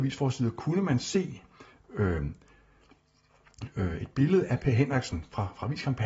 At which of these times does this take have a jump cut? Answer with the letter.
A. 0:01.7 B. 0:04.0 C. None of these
C